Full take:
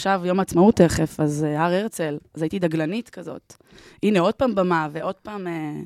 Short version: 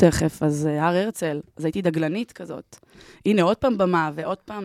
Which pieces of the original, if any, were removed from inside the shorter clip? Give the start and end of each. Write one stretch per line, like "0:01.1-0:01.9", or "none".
none